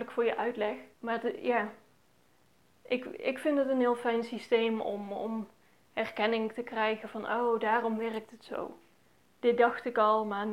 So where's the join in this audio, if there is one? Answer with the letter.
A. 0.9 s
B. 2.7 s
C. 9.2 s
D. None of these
A